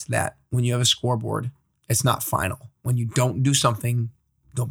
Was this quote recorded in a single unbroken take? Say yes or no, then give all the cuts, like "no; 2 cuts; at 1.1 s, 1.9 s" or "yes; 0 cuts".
no; 1 cut; at 1.8 s